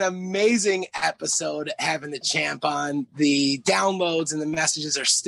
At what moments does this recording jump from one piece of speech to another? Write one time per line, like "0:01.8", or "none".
none